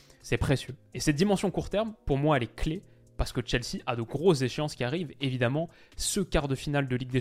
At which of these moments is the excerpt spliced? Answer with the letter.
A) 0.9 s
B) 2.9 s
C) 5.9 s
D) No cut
D